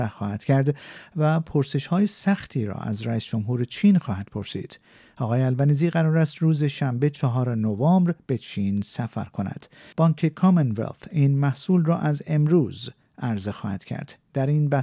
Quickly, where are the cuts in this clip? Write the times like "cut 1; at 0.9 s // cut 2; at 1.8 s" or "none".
cut 1; at 9.9 s